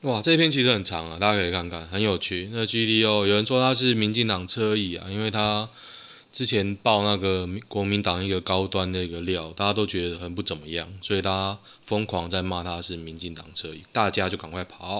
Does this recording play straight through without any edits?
no; 2 cuts; at 10.1 s, 13.8 s

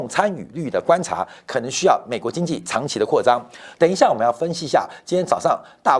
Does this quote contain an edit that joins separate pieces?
yes; 1 cut; at 3.7 s

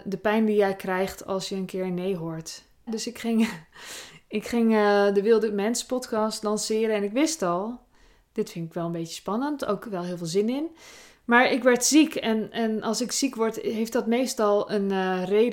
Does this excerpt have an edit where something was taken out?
yes; 1 cut; at 2.9 s

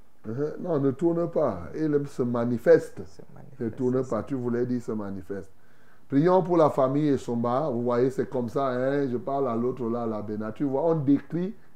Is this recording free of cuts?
yes; 0 cuts

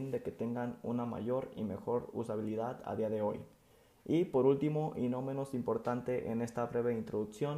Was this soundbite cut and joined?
no; 0 cuts

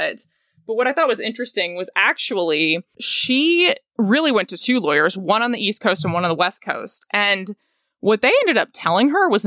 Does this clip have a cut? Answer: no; 0 cuts

